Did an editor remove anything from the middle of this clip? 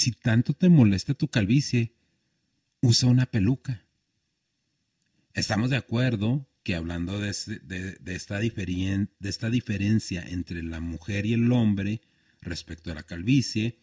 no; 0 cuts

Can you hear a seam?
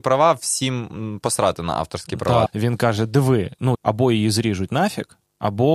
yes; 2 cuts; at 2.5 s, 3.7 s

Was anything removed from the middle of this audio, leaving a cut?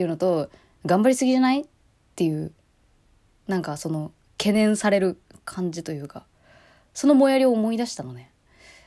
no; 0 cuts

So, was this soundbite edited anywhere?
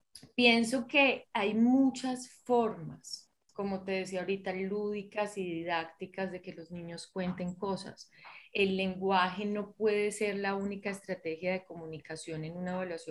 no; 0 cuts

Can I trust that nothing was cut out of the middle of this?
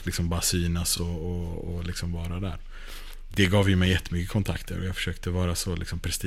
yes; 0 cuts

